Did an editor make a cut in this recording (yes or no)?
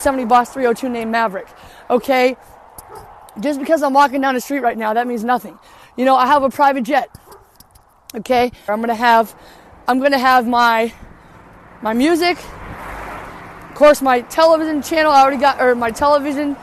yes